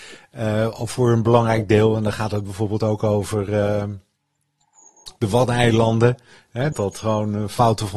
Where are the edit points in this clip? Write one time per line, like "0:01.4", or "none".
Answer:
0:05.2
0:06.7